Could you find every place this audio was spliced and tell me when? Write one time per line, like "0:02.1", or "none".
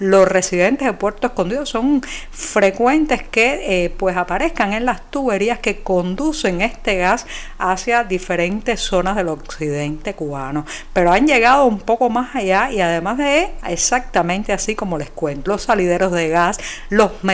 0:13.6
0:15.5